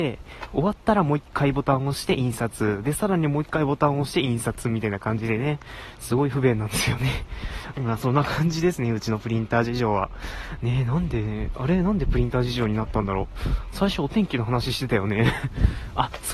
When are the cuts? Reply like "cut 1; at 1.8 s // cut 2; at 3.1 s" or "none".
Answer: cut 1; at 7.7 s